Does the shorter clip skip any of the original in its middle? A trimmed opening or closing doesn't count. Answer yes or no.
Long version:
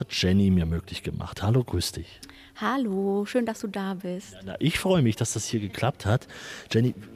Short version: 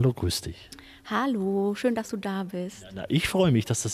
no